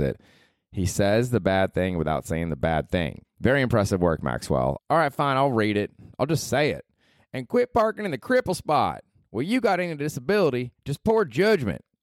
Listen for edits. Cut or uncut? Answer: cut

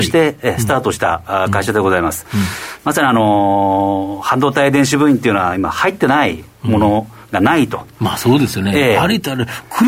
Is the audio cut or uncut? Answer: cut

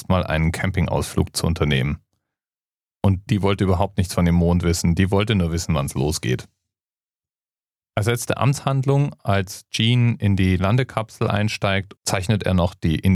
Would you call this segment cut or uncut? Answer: cut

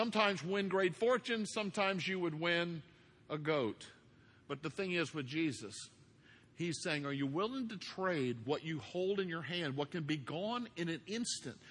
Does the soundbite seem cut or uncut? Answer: uncut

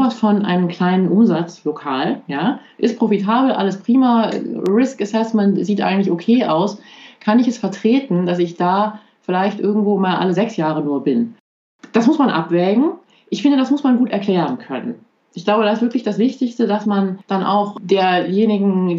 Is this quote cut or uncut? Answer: uncut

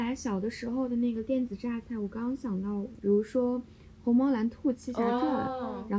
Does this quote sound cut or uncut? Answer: cut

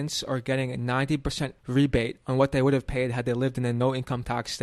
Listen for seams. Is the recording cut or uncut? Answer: cut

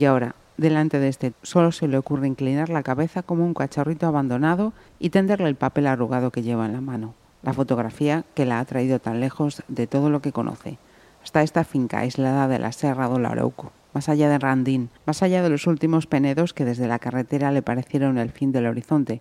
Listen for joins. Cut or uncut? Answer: cut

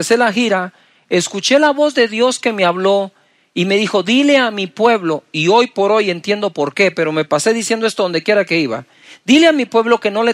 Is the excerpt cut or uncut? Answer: uncut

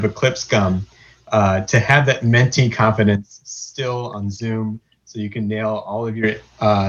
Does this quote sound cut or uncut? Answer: uncut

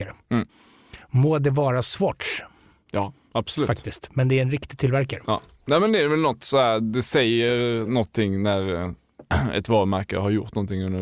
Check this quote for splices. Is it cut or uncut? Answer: uncut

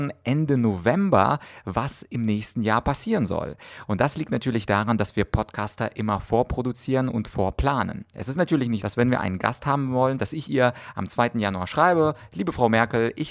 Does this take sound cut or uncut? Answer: cut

